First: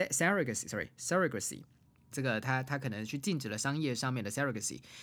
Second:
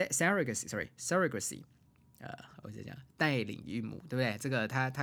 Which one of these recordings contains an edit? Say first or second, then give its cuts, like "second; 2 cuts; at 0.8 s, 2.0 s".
first; 1 cut; at 2.1 s